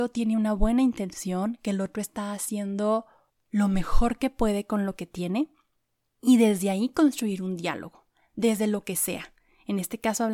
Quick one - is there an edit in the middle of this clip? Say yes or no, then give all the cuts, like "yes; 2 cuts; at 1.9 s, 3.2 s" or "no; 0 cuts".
no; 0 cuts